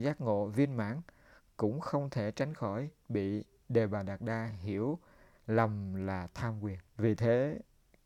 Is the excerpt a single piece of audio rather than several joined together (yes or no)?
no